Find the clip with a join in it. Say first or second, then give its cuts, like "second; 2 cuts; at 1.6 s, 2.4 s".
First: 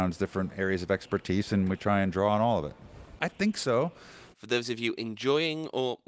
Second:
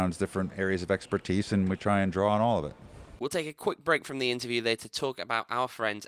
first; 2 cuts; at 3.2 s, 4.3 s